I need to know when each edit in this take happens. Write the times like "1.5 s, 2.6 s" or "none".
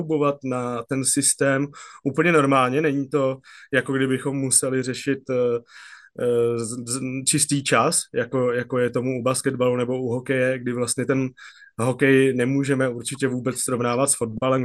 none